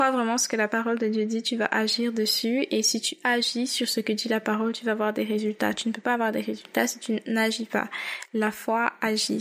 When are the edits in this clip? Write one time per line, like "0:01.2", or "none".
none

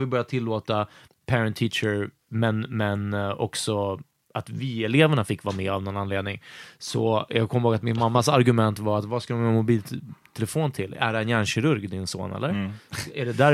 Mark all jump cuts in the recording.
0:01.1

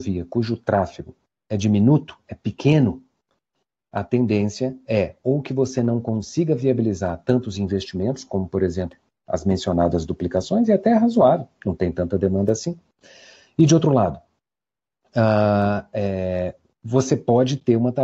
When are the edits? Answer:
none

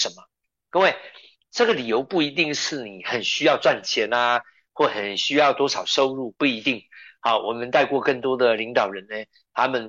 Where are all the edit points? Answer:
none

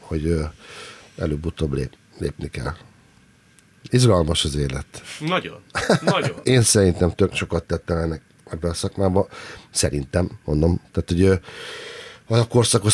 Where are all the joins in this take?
none

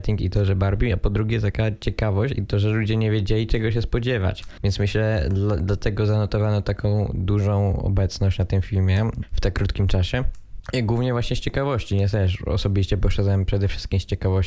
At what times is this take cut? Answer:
none

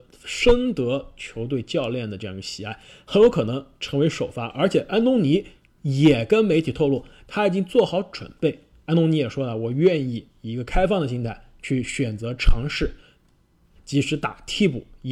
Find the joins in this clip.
0:08.9
0:13.8

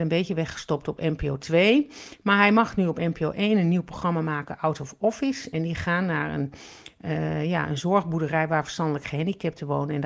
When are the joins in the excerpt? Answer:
0:05.5

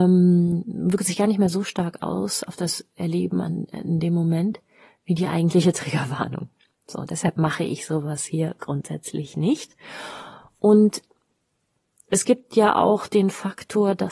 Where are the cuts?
none

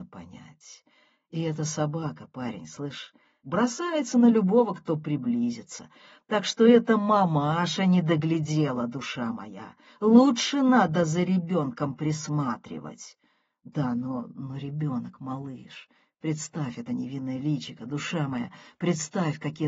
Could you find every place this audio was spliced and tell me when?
0:03.4

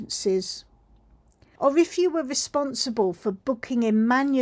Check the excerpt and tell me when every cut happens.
0:01.6

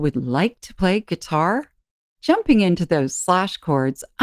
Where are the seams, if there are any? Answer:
0:02.1

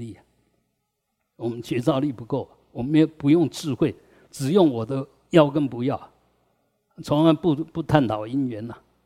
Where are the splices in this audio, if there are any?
none

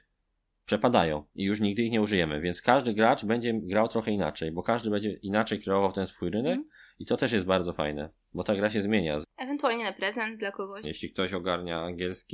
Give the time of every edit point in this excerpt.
0:09.2
0:10.8

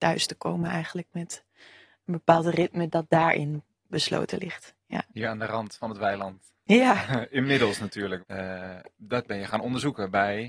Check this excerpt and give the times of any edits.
0:05.1
0:08.2

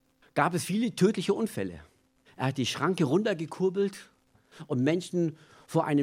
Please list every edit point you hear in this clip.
0:02.2

